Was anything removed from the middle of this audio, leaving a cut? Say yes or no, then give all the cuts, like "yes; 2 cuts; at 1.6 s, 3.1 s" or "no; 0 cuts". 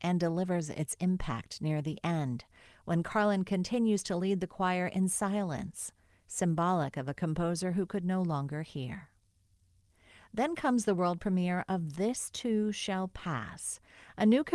no; 0 cuts